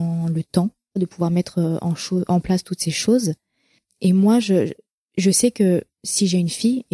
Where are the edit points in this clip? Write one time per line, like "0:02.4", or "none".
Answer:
none